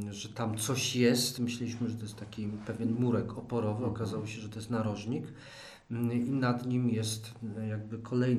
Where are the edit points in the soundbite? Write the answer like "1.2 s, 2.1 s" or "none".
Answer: none